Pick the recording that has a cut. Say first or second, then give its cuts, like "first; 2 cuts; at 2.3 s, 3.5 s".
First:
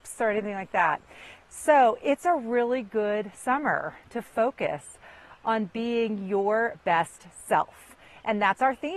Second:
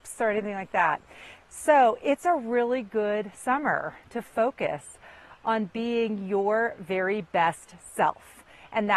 first; 1 cut; at 6.7 s